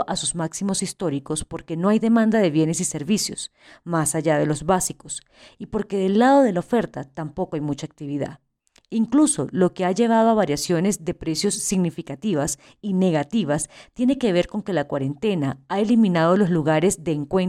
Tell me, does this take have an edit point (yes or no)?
no